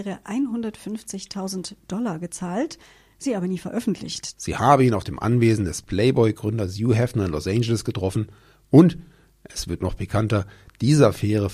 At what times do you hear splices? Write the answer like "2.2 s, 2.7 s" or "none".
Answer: 4.3 s